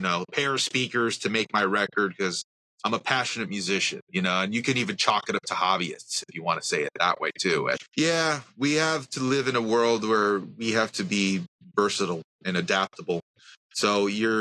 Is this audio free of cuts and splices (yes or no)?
no